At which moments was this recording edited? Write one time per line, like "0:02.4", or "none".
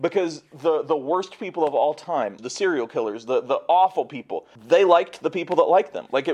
0:02.4
0:04.6